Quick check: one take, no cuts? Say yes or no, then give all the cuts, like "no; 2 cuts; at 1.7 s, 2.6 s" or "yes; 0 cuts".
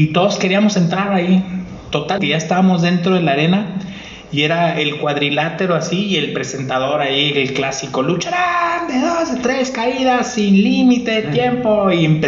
no; 1 cut; at 2.2 s